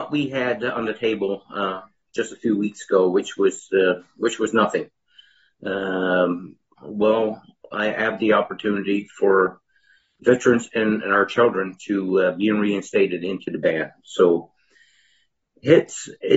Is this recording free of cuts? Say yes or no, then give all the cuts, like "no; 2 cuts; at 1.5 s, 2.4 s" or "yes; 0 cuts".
no; 1 cut; at 6.8 s